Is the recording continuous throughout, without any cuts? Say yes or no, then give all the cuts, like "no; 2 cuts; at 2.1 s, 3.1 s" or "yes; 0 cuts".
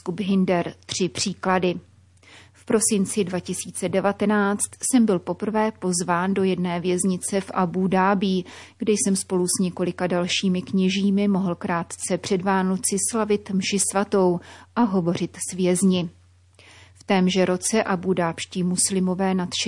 yes; 0 cuts